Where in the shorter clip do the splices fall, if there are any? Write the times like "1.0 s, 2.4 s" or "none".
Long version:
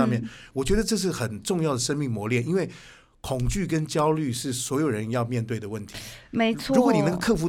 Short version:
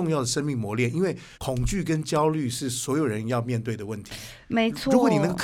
1.3 s